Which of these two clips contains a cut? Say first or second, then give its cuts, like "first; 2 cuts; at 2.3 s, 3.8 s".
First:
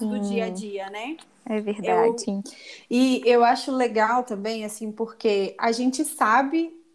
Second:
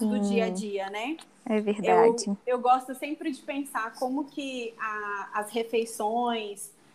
first; 1 cut; at 2.2 s